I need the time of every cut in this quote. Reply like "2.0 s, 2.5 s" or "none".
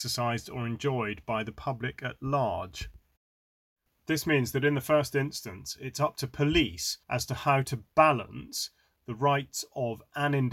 3.9 s, 7.0 s